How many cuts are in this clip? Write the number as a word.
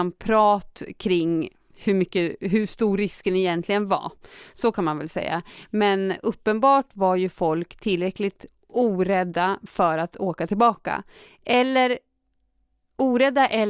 zero